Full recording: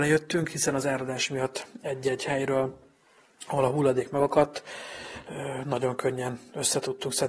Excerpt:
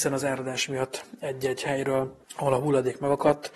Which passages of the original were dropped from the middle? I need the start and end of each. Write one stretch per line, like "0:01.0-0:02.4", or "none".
0:02.9-0:03.4